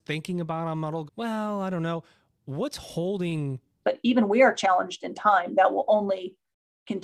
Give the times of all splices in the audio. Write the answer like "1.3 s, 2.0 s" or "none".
1.1 s, 3.8 s